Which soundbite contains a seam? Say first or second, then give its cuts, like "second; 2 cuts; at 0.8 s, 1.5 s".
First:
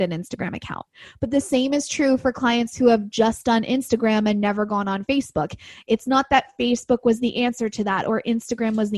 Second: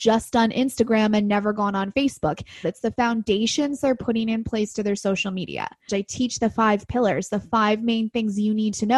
second; 2 cuts; at 2.6 s, 5.9 s